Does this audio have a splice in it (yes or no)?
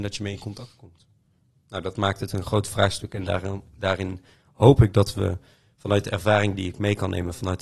no